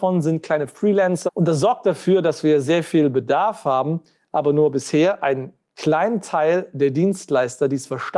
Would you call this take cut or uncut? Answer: cut